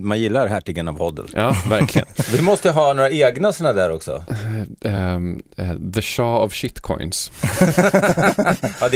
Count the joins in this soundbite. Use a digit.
0